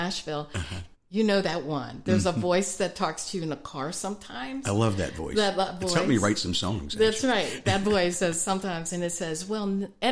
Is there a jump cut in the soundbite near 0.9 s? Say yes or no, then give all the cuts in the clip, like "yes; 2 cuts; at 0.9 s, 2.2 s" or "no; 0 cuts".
yes; 1 cut; at 0.9 s